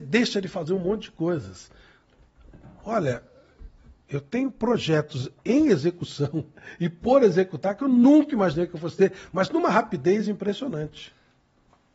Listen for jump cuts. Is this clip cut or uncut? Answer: uncut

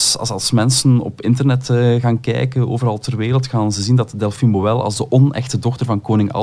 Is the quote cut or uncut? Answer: uncut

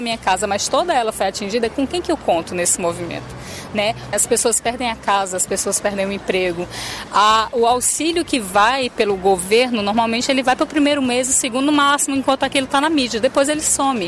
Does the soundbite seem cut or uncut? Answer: cut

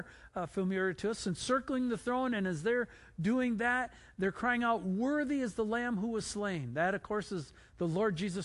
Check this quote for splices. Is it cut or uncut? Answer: uncut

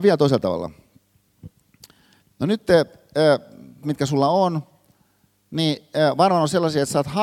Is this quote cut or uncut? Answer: cut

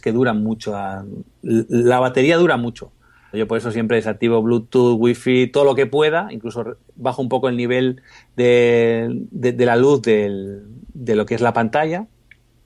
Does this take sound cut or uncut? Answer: cut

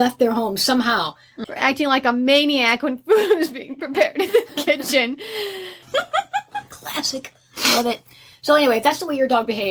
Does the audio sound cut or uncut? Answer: cut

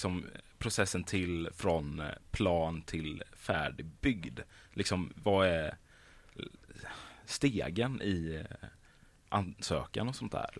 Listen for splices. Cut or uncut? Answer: uncut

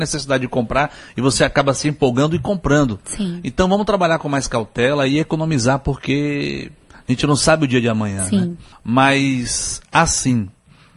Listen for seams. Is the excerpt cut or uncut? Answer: cut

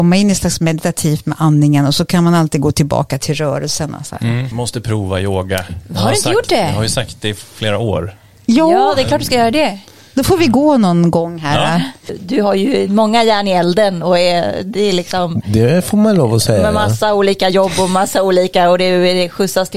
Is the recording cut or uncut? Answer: uncut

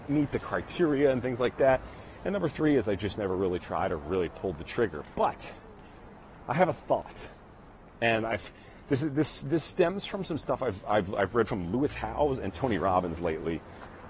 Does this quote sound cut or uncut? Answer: uncut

